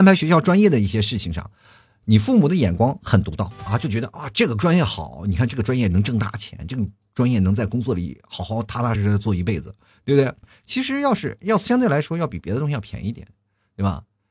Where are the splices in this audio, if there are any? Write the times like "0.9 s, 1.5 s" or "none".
8.9 s, 10.4 s